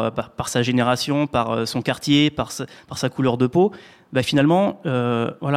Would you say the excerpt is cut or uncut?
uncut